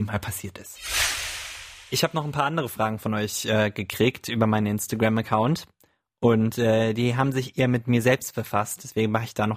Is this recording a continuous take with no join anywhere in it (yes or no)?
yes